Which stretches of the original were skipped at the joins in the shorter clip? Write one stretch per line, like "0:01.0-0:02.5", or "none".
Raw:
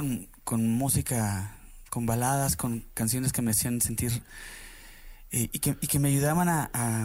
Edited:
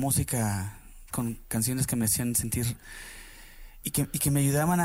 0:01.9-0:02.6
0:05.3-0:05.5